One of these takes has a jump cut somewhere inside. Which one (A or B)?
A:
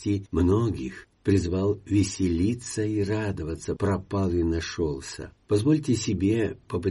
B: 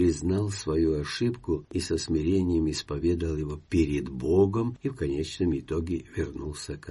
A